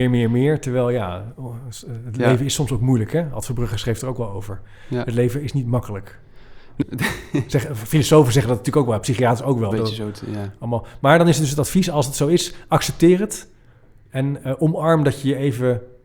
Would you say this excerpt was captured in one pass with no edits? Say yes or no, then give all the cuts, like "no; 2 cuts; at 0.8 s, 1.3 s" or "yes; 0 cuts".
no; 2 cuts; at 6.8 s, 9.7 s